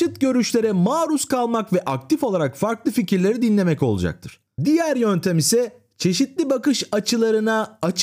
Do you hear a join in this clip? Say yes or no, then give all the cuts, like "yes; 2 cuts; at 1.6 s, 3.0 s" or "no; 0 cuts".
yes; 1 cut; at 4.6 s